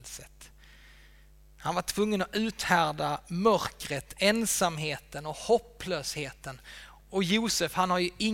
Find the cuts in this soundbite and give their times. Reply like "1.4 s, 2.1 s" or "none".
none